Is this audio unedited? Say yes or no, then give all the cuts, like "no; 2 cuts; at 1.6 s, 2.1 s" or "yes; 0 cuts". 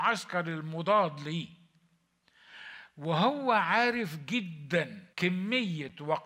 no; 1 cut; at 5.1 s